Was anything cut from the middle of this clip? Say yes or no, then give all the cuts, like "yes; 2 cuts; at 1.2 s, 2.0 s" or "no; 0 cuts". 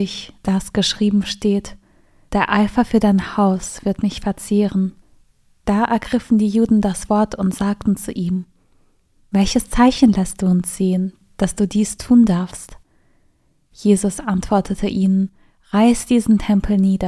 no; 0 cuts